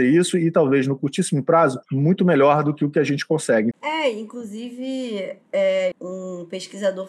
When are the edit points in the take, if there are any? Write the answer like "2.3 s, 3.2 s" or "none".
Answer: 3.7 s, 5.9 s